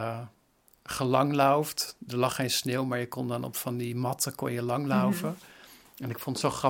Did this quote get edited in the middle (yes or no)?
no